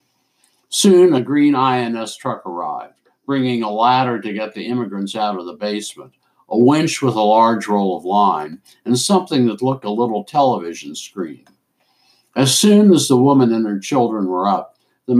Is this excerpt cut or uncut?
cut